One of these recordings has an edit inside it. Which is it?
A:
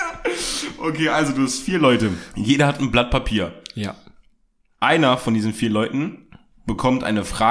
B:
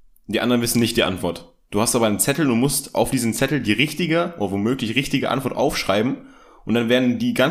A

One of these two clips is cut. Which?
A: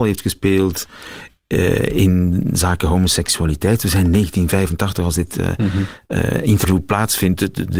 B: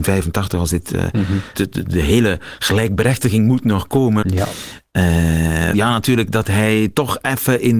B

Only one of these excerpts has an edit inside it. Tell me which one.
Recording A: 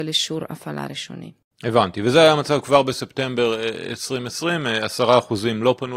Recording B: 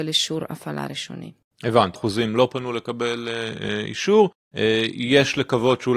B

